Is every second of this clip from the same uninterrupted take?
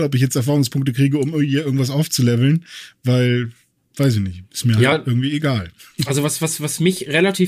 yes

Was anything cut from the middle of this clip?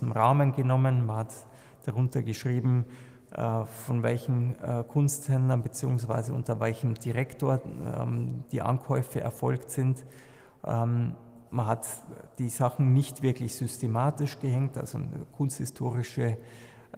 yes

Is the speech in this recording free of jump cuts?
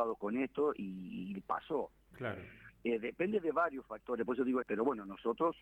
no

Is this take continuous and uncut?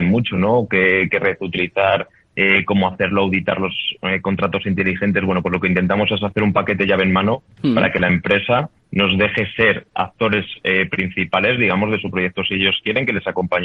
no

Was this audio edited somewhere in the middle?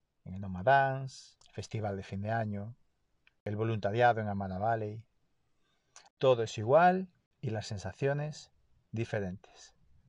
yes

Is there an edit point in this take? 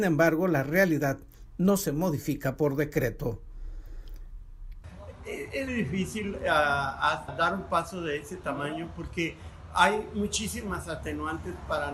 yes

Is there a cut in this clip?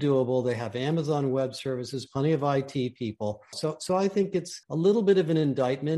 yes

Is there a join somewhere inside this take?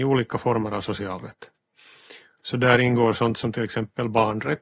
yes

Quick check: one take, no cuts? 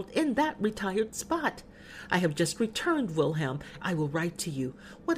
no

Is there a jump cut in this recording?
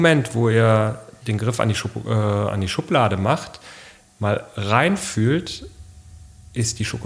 yes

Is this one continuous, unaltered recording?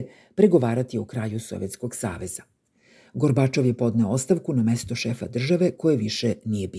yes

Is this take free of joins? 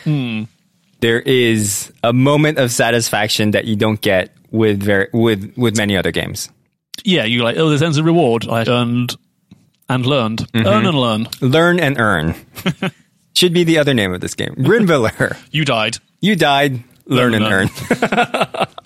no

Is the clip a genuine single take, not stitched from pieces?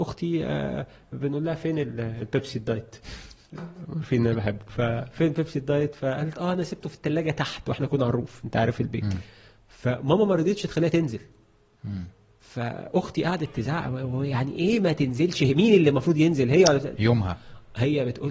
yes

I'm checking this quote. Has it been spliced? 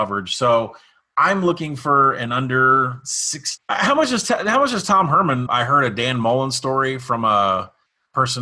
yes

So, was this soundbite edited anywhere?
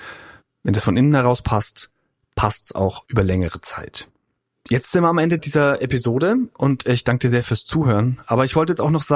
yes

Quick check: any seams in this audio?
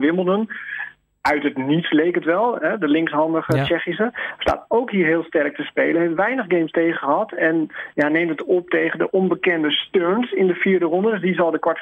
no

